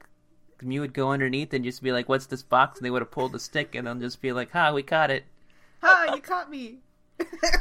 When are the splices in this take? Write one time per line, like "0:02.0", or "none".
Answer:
none